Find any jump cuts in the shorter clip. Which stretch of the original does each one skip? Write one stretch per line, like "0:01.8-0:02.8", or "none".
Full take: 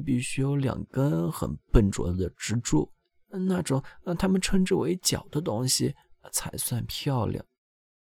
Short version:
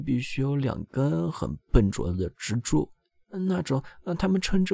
none